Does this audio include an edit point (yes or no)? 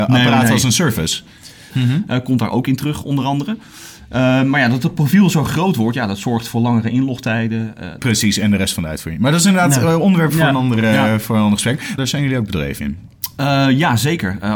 yes